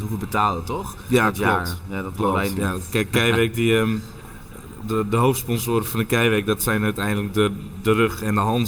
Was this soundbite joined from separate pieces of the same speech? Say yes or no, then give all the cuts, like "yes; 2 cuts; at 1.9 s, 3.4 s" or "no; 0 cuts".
no; 0 cuts